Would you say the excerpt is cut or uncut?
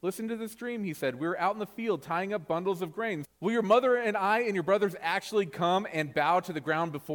cut